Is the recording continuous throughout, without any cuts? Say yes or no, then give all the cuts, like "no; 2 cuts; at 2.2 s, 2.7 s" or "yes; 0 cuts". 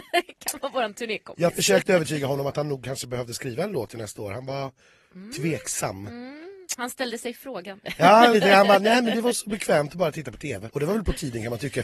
no; 2 cuts; at 8.3 s, 10.7 s